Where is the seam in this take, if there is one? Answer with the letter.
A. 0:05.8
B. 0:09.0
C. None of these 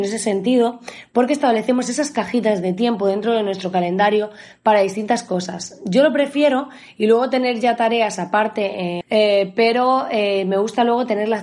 B